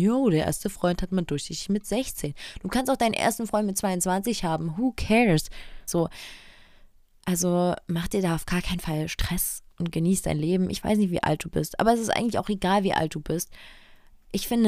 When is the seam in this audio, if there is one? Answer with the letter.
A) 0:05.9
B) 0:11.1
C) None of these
A